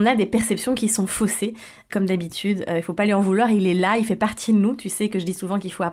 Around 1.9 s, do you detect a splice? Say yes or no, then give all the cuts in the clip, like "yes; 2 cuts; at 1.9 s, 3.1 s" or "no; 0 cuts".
yes; 1 cut; at 1.9 s